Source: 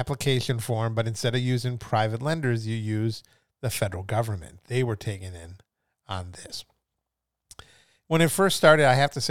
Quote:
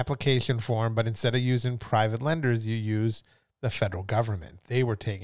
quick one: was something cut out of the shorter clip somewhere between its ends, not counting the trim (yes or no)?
no